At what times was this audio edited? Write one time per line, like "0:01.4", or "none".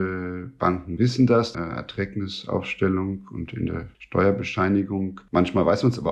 0:01.5
0:03.9